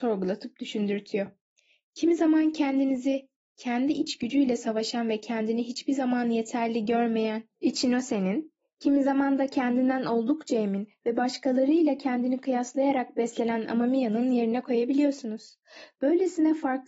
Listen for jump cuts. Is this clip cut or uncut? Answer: uncut